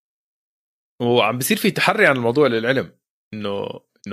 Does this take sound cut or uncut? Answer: uncut